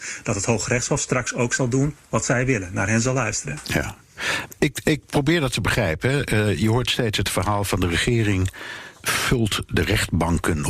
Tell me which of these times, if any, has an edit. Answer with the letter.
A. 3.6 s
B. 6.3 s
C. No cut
C